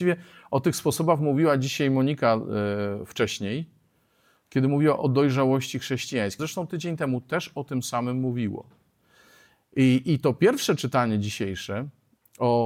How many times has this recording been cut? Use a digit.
1